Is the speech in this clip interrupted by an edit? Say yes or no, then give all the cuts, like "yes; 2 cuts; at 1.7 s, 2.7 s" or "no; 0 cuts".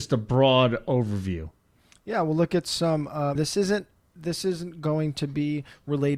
yes; 1 cut; at 3.4 s